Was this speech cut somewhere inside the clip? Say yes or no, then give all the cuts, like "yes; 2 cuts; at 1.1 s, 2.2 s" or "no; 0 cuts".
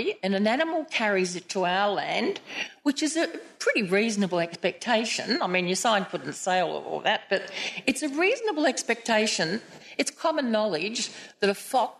no; 0 cuts